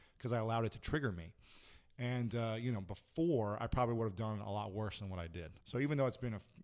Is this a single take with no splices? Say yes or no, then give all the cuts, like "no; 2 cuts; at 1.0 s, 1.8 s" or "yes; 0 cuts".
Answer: no; 1 cut; at 5.6 s